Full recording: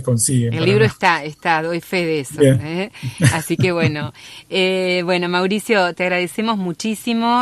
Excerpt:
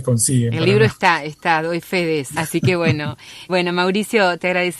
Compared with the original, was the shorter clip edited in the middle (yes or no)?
yes